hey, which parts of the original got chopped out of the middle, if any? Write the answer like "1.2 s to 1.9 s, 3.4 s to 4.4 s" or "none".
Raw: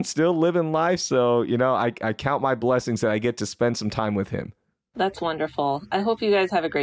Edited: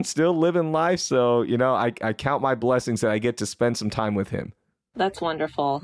none